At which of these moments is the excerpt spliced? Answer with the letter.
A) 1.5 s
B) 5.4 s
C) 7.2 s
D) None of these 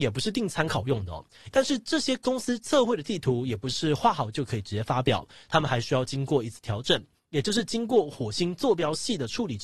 A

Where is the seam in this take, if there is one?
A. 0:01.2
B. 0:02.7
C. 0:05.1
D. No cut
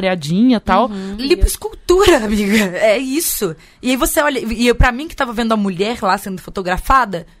A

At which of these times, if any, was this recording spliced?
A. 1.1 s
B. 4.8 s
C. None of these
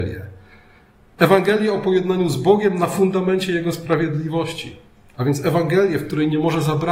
C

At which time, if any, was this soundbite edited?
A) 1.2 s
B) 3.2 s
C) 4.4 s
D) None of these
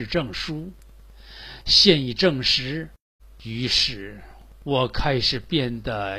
B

